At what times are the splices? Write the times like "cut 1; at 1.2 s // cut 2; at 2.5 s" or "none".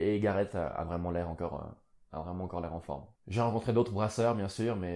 cut 1; at 3.2 s